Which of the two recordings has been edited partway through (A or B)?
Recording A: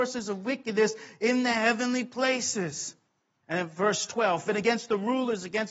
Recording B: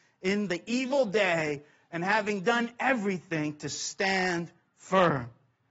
A